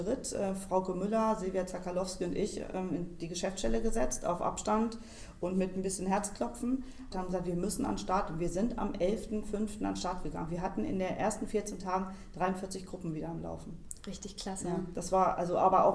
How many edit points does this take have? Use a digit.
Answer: 1